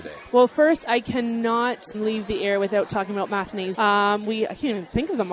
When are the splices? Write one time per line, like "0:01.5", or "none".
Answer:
0:01.9
0:03.7